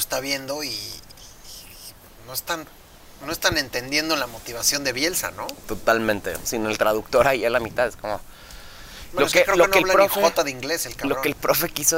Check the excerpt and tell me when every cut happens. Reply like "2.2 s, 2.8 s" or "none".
6.4 s